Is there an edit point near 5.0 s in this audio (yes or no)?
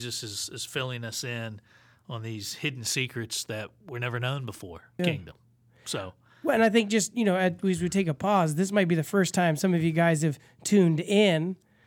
yes